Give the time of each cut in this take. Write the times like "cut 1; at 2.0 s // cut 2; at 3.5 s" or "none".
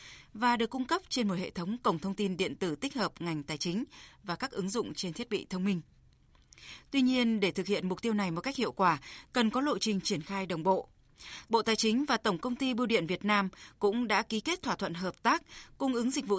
cut 1; at 11.4 s